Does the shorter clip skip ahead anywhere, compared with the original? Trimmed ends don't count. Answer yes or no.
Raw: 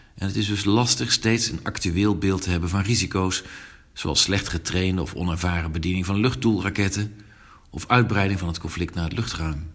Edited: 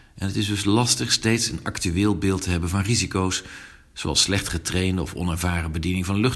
no